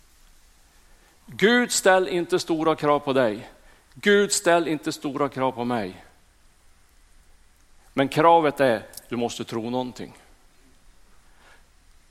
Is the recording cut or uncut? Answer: uncut